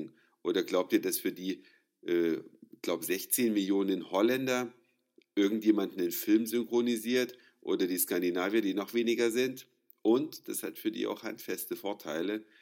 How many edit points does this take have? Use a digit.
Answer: 0